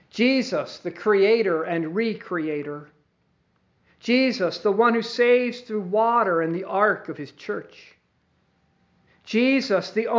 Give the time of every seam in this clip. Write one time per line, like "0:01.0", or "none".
none